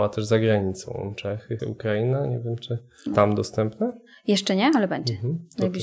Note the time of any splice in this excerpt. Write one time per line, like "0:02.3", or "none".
0:01.6
0:03.1